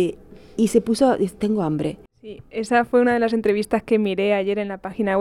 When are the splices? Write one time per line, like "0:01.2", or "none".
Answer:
0:02.1